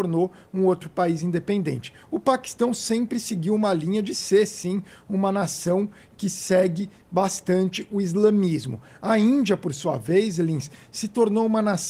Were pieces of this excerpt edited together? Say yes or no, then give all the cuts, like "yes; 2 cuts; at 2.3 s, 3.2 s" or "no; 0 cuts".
no; 0 cuts